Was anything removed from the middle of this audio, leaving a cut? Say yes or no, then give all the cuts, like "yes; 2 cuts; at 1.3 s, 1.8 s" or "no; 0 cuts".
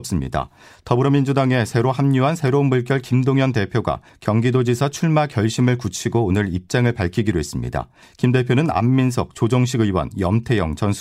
no; 0 cuts